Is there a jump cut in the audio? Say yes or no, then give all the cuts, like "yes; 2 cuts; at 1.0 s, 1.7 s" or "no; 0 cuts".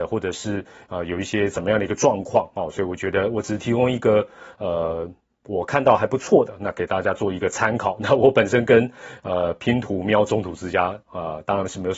no; 0 cuts